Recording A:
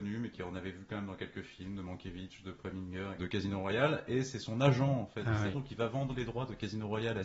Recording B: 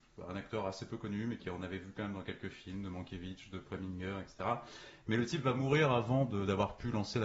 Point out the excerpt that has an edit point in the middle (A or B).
A